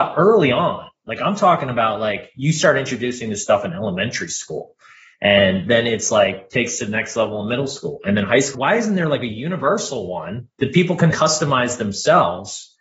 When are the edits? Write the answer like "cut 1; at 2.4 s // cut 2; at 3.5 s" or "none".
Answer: cut 1; at 8.5 s // cut 2; at 11.1 s